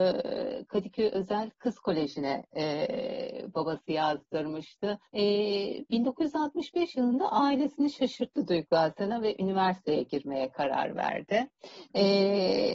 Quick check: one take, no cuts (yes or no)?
no